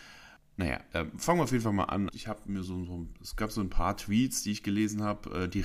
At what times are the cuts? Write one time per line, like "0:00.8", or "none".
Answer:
0:02.1